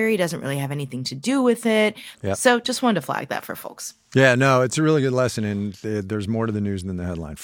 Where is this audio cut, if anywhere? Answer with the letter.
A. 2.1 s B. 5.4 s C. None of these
A